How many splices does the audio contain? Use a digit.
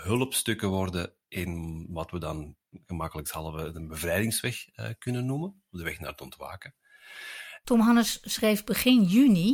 1